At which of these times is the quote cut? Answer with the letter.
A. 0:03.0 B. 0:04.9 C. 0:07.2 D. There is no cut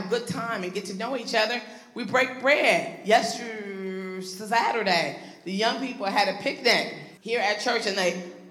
C